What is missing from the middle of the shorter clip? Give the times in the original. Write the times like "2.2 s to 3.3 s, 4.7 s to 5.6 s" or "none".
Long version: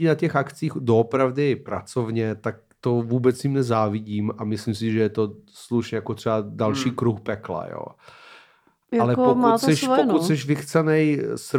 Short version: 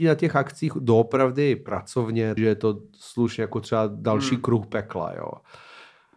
2.4 s to 4.9 s